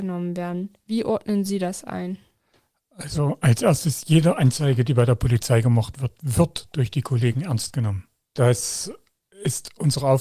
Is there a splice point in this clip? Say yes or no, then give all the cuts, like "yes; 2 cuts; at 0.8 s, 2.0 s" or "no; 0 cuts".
no; 0 cuts